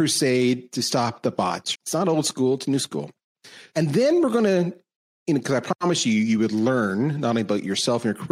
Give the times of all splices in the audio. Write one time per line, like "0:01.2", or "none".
0:01.7
0:03.7

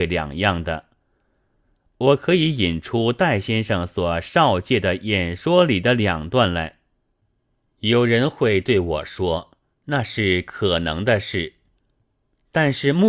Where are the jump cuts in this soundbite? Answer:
0:09.7

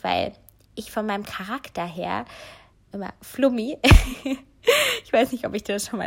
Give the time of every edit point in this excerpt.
0:02.9

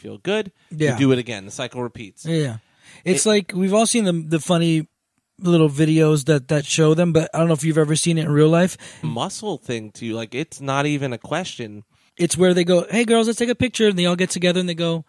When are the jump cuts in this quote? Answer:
0:09.0
0:12.1

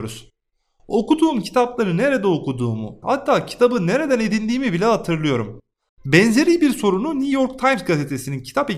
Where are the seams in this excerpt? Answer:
0:03.0
0:05.9

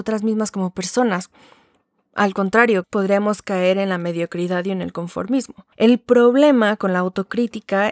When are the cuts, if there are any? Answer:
0:02.8
0:05.7

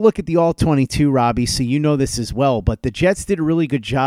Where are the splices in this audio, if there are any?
none

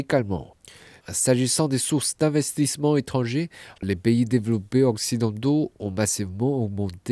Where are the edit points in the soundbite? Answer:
0:03.8

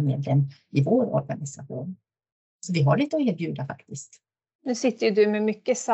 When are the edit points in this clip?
0:04.6

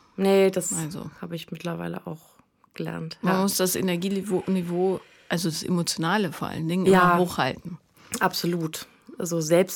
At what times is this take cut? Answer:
none

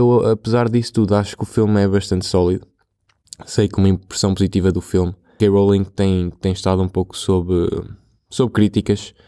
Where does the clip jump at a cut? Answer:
0:05.4

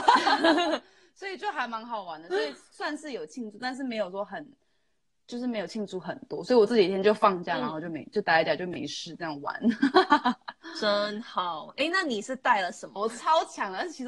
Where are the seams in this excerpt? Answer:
0:13.0

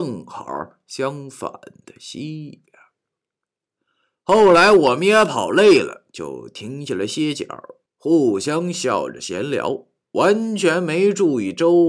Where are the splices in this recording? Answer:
none

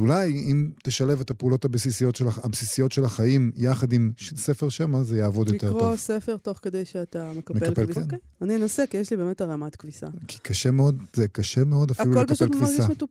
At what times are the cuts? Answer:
0:08.0
0:11.1

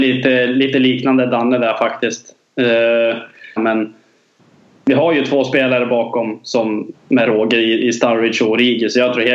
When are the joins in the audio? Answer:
0:03.6
0:06.9

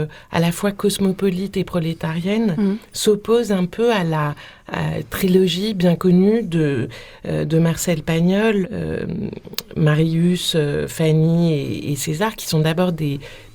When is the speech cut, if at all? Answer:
0:08.6

